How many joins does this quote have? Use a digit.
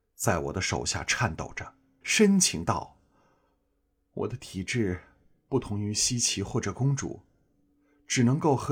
1